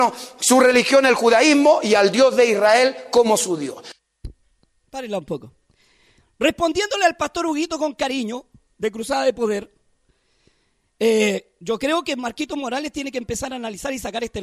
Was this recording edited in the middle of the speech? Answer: no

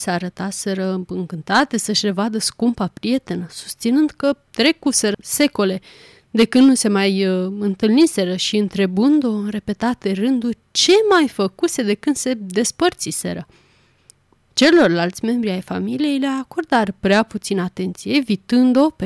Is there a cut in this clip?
no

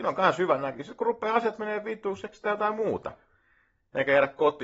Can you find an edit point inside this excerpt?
no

